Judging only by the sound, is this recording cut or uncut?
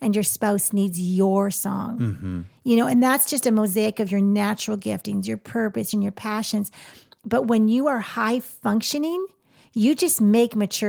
cut